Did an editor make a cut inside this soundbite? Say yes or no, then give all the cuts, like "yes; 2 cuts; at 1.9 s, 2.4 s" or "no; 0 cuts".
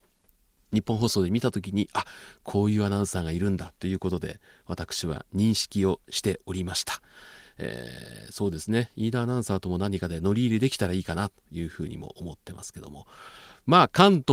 no; 0 cuts